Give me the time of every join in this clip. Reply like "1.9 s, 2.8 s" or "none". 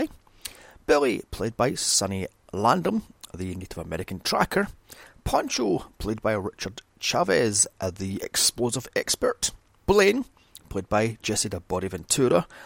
9.8 s

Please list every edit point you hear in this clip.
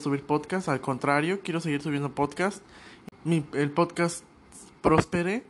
3.1 s

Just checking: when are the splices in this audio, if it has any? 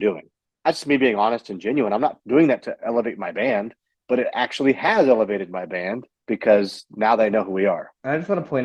none

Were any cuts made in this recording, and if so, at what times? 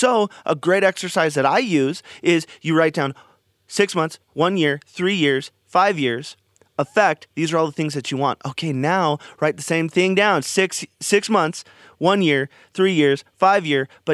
none

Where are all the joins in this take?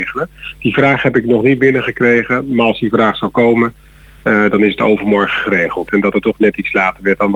5.9 s

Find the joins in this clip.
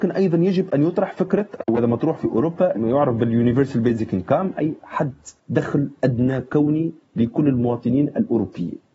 5.4 s

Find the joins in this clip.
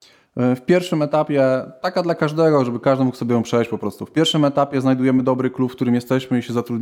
none

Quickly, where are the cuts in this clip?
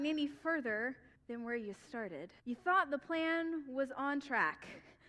1.2 s, 2.4 s

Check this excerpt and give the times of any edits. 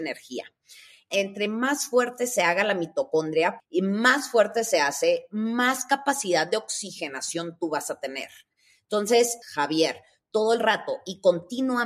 3.6 s, 9.4 s

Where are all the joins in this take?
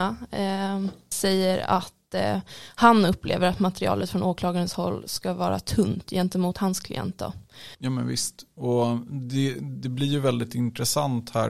1.1 s, 7.7 s

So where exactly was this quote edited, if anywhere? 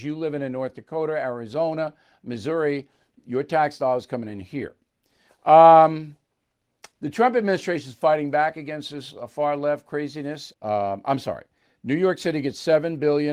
5.3 s, 6.9 s, 10.5 s

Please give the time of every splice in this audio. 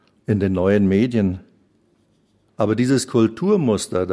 2.5 s

